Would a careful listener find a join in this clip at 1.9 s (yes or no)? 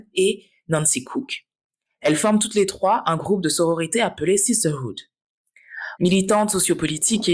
no